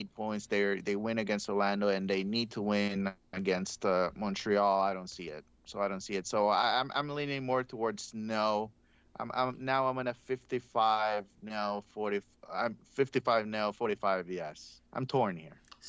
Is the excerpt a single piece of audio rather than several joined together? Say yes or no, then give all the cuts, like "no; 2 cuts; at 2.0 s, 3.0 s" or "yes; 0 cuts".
no; 1 cut; at 14.9 s